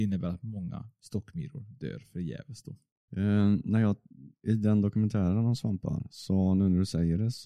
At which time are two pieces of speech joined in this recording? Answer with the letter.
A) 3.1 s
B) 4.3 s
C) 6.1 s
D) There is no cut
A